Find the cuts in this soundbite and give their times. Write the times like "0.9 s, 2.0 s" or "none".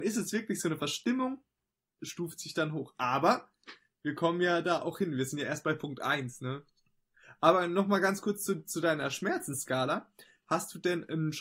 2.0 s